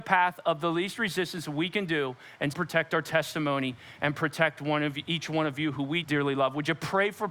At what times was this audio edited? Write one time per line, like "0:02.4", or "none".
0:02.5
0:06.0